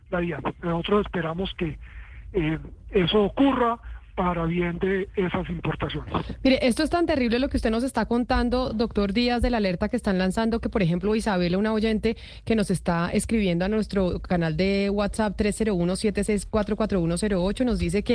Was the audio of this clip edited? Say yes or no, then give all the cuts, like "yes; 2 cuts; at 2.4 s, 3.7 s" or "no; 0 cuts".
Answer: no; 0 cuts